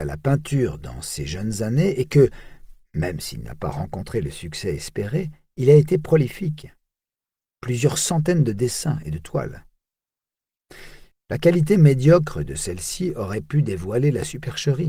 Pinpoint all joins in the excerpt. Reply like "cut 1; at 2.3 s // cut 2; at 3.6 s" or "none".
cut 1; at 11.1 s

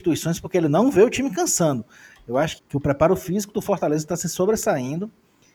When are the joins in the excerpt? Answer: cut 1; at 2.6 s

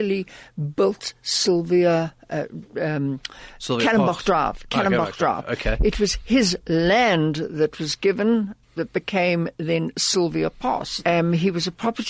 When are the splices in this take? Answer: cut 1; at 8.6 s // cut 2; at 11.0 s

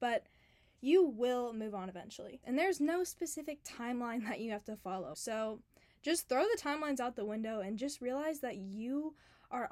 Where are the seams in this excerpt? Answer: cut 1; at 2.4 s // cut 2; at 5.1 s

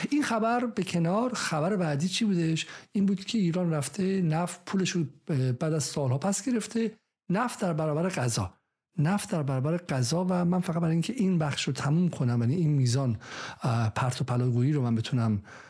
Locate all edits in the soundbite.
none

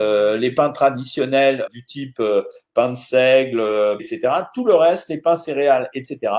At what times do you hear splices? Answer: cut 1; at 1.7 s // cut 2; at 4.0 s

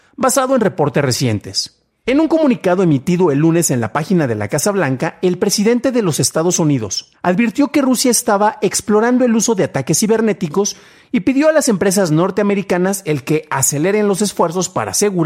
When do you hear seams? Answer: cut 1; at 2.1 s // cut 2; at 7.1 s

